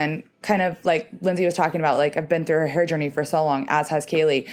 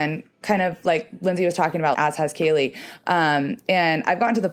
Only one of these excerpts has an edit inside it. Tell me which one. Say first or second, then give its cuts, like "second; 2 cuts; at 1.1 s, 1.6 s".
second; 1 cut; at 1.9 s